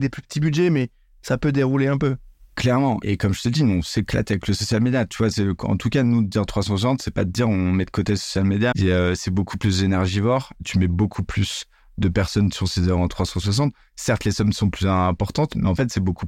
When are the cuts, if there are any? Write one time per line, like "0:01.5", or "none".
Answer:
0:08.7